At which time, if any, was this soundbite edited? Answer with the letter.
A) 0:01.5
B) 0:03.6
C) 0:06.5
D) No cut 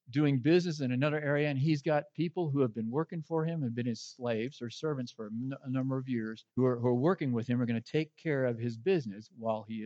C